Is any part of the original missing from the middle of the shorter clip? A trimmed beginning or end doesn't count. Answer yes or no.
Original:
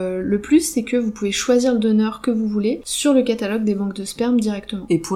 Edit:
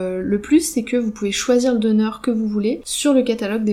no